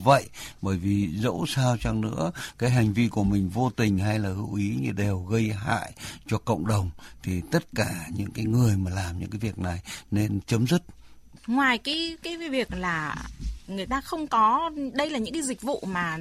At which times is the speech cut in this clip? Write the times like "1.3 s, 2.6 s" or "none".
none